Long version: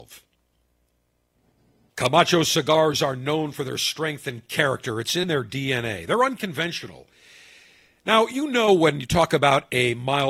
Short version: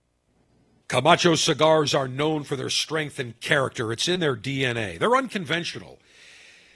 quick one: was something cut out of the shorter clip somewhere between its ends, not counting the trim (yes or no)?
no